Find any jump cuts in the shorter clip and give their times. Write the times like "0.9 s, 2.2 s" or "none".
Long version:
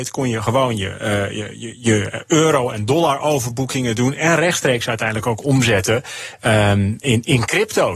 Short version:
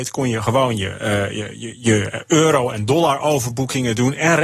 none